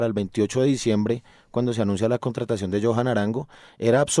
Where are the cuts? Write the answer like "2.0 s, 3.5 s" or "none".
none

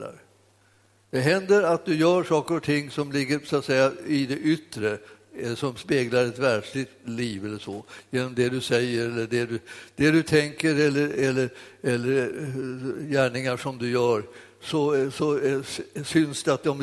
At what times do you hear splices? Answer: none

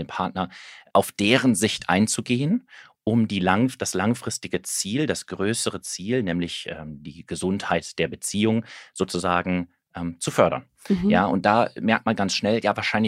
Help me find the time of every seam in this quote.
none

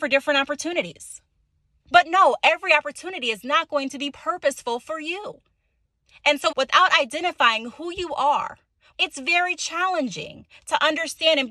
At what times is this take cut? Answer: 6.5 s, 8.9 s

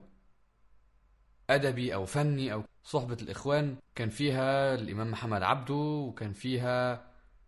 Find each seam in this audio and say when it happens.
2.7 s, 3.9 s

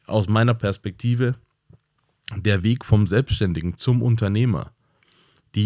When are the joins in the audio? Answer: none

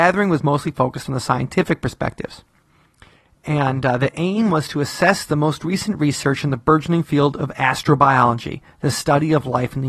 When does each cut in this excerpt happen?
none

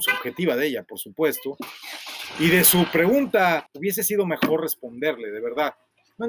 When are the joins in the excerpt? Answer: 3.7 s

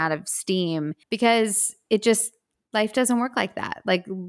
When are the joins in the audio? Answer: 1.0 s

